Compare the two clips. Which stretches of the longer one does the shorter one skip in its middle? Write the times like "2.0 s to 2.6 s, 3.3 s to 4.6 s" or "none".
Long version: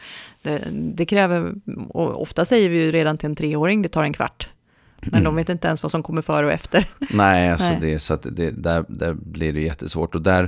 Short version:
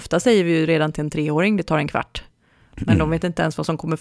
none